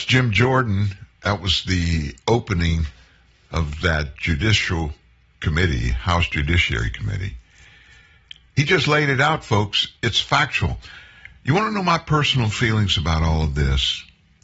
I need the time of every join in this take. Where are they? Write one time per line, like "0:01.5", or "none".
none